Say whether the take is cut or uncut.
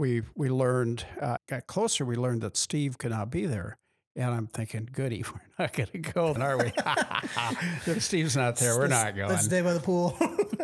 cut